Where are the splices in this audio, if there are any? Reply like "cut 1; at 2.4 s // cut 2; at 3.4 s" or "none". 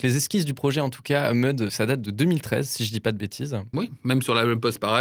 none